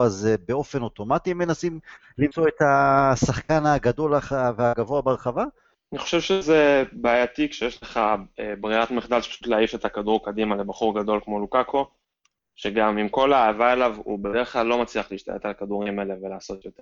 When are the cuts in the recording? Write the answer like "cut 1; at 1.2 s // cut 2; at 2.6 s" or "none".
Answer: cut 1; at 5.7 s

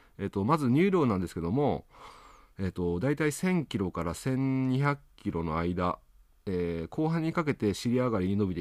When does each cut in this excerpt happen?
none

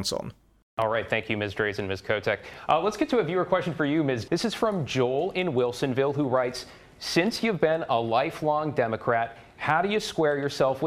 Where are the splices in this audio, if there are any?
cut 1; at 4.3 s

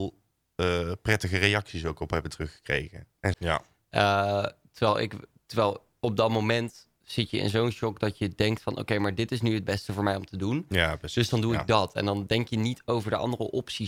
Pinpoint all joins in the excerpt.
cut 1; at 3.3 s

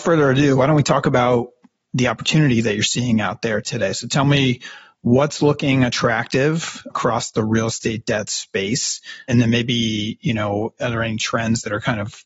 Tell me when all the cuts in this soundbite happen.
none

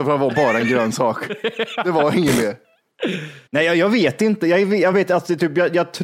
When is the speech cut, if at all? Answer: cut 1; at 3.5 s // cut 2; at 4.9 s

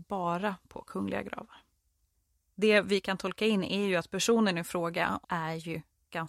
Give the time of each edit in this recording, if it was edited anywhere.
cut 1; at 2.5 s // cut 2; at 5.2 s

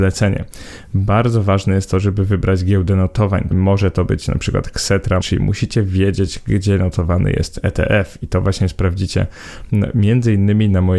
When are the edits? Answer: cut 1; at 3.5 s // cut 2; at 5.2 s

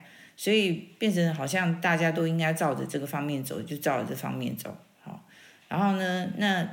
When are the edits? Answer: none

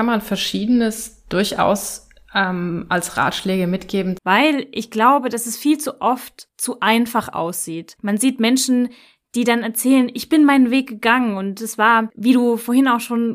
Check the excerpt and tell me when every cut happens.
cut 1; at 4.2 s

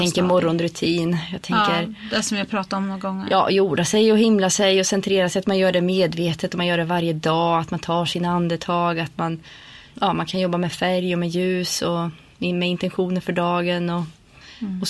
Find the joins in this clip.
cut 1; at 9.9 s

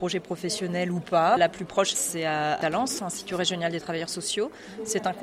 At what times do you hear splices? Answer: cut 1; at 1.4 s // cut 2; at 3.0 s

